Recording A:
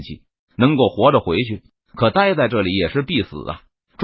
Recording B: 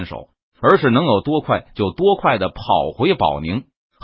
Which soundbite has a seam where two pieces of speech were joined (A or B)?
A